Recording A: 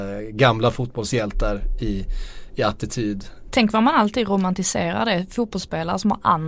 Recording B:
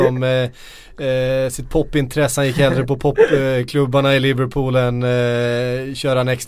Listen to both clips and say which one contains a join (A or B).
A